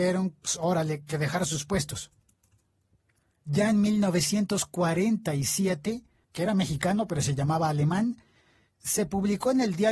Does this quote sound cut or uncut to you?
cut